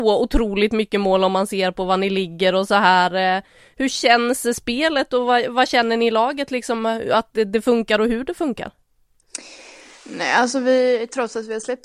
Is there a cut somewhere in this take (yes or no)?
no